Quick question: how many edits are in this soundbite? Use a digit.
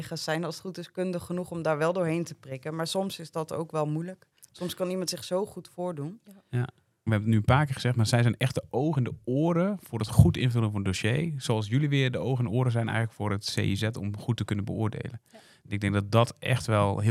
1